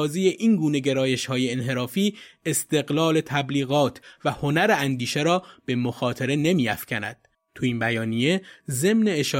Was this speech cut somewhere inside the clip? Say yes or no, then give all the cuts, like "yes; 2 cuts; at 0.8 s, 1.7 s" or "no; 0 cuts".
yes; 1 cut; at 7.3 s